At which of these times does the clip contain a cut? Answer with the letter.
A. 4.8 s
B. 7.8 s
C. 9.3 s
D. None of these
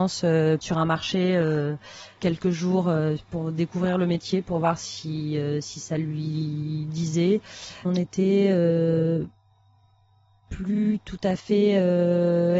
B